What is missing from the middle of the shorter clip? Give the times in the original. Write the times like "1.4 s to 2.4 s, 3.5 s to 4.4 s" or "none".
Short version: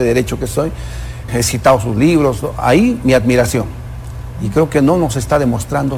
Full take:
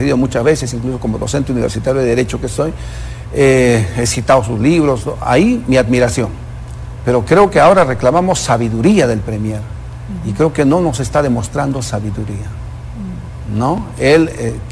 3.3 s to 3.9 s, 7.0 s to 10.2 s